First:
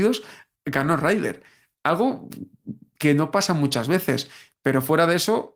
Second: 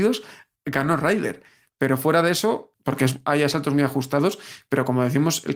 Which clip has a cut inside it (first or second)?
second